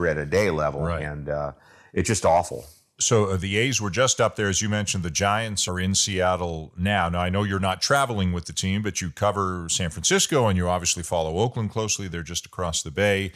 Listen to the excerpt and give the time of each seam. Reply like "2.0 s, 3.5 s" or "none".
none